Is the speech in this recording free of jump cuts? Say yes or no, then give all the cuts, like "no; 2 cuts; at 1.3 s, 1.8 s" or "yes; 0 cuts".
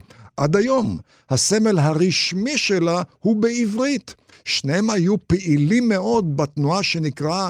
no; 1 cut; at 4.3 s